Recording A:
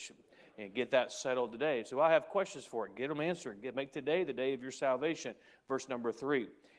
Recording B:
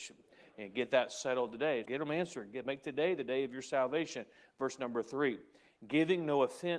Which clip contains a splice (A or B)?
B